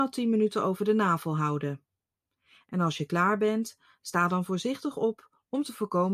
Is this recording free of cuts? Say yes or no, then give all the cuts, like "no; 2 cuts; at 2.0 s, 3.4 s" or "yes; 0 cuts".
yes; 0 cuts